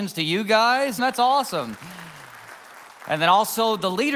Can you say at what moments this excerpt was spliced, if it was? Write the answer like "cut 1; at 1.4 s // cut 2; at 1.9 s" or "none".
cut 1; at 1.0 s